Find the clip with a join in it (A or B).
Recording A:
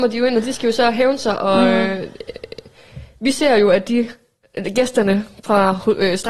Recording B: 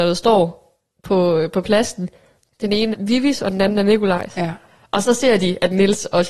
B